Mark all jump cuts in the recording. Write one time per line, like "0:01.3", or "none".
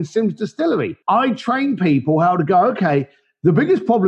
0:01.0